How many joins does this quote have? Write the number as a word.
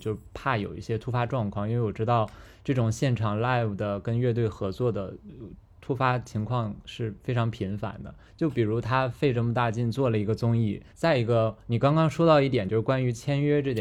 two